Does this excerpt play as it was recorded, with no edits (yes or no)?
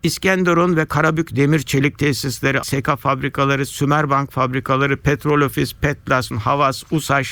no